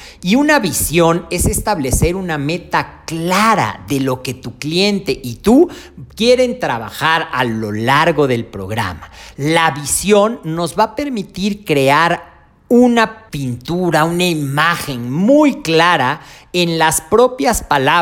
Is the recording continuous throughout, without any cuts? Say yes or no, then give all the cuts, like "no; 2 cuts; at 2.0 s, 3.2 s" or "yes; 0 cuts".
yes; 0 cuts